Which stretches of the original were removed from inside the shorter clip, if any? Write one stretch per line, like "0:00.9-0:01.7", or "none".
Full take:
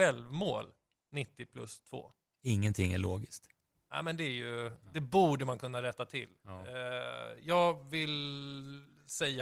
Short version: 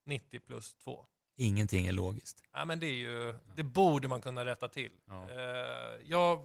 0:03.5-0:03.9